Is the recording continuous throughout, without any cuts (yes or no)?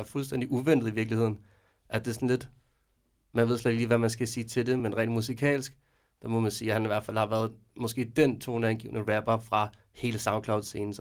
yes